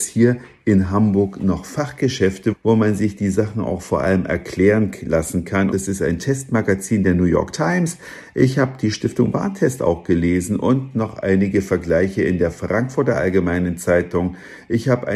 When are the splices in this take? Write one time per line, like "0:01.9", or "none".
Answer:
0:02.5
0:05.7